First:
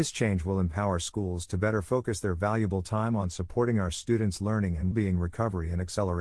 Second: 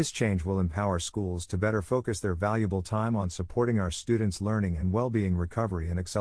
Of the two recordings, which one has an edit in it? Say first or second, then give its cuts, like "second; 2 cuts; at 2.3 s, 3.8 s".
first; 1 cut; at 4.9 s